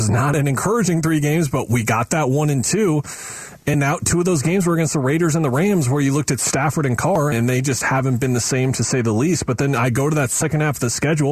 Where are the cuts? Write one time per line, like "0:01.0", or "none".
0:07.3